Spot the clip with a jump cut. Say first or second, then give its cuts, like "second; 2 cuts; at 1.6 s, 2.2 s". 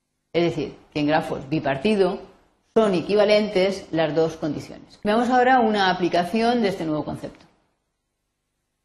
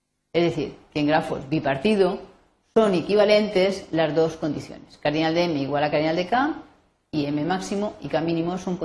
first; 1 cut; at 5.0 s